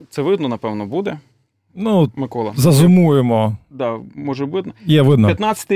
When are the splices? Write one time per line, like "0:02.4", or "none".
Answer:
none